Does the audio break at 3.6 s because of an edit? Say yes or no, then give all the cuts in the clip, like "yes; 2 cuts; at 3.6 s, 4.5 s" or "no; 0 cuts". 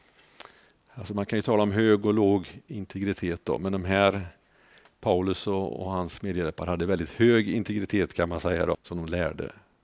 no; 1 cut; at 8.7 s